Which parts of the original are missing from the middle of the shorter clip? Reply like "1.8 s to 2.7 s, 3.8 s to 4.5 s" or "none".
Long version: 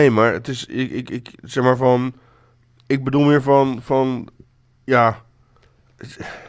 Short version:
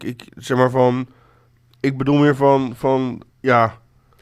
4.4 s to 4.7 s